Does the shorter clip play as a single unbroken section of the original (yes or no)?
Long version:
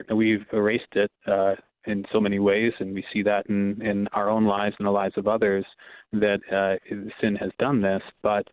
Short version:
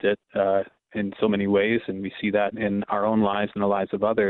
no